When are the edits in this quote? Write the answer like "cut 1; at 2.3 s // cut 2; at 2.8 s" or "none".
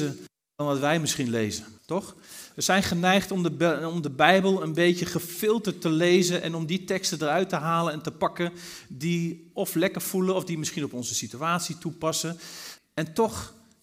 cut 1; at 1.8 s // cut 2; at 12.8 s